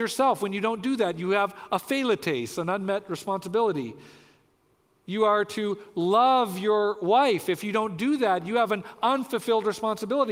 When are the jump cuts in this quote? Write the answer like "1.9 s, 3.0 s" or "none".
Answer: none